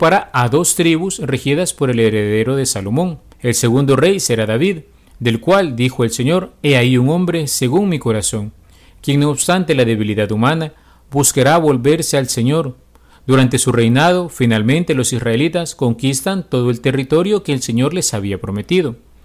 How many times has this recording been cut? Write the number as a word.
one